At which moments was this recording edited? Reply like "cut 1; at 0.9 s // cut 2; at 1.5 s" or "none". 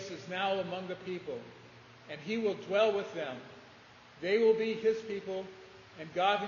none